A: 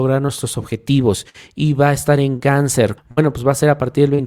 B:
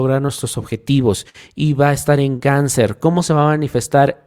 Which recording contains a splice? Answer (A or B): A